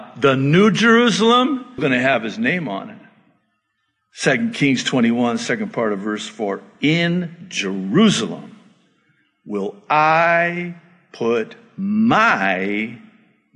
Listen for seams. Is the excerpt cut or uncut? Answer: cut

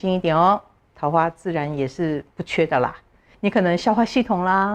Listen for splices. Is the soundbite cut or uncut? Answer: cut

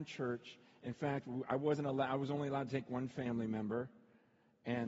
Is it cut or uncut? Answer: uncut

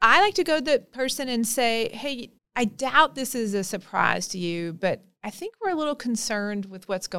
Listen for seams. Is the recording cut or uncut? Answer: cut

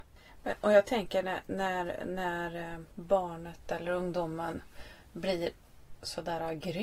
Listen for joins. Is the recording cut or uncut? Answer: cut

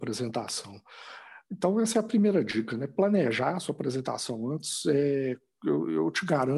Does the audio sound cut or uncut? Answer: uncut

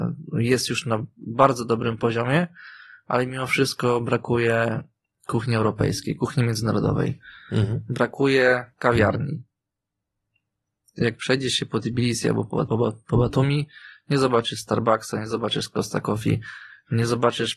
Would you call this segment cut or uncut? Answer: cut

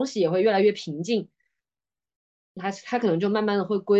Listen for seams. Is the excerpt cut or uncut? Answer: uncut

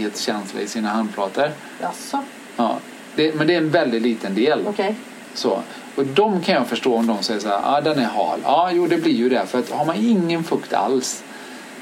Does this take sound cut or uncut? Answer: uncut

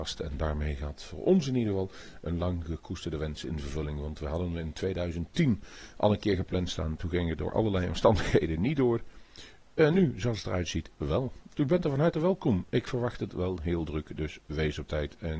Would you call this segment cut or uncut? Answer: uncut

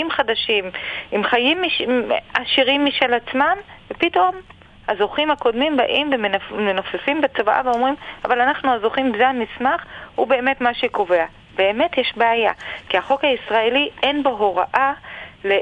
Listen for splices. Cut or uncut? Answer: uncut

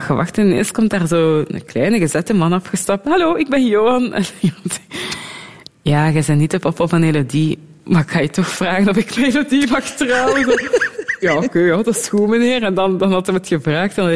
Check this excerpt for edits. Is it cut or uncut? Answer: uncut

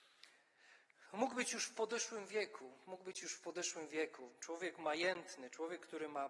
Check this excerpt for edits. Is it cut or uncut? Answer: uncut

